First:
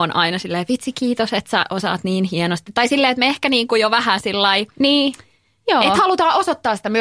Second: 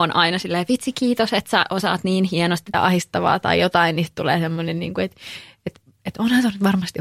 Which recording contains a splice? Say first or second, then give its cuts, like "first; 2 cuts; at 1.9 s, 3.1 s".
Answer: second; 1 cut; at 2.7 s